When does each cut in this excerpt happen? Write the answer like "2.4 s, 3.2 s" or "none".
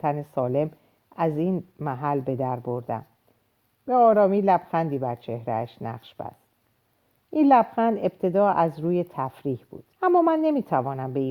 3.7 s, 9.9 s